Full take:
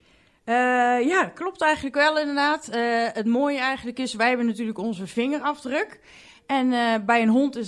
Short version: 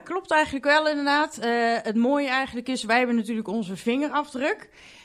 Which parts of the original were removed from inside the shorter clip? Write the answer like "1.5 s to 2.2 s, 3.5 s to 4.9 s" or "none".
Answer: none